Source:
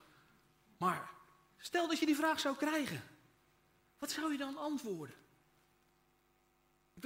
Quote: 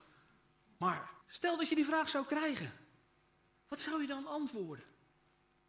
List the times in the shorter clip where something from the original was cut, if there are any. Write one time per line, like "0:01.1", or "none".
0:01.2